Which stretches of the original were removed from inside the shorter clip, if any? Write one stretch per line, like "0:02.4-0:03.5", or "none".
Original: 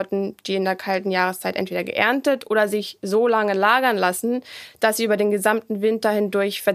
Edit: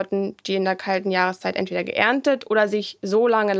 none